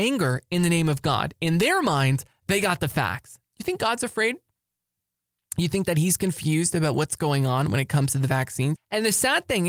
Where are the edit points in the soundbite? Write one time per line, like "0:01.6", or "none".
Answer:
0:03.4
0:08.8